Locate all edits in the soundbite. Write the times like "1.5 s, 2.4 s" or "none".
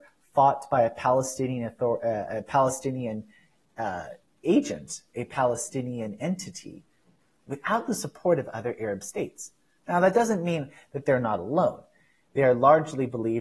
none